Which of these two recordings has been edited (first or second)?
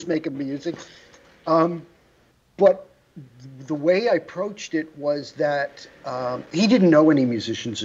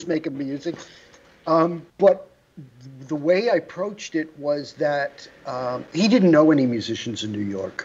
second